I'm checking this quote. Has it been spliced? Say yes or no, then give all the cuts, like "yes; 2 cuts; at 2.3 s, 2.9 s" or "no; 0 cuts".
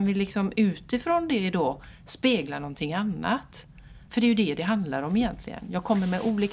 yes; 1 cut; at 4.1 s